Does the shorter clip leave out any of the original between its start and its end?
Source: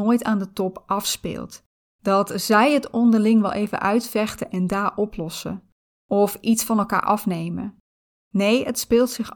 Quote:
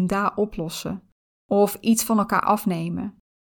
no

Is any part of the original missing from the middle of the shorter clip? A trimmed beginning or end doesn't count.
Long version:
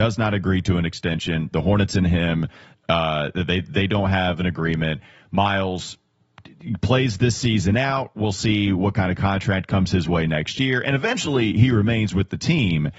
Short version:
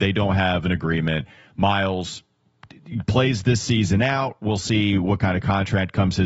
no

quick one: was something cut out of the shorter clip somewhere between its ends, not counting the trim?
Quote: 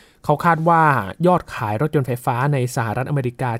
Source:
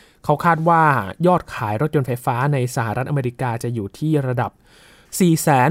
no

